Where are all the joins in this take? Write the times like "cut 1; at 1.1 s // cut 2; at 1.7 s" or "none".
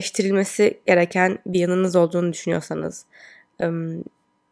none